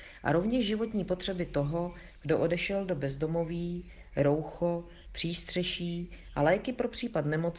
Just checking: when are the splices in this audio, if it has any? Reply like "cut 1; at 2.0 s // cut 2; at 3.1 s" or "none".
cut 1; at 5.0 s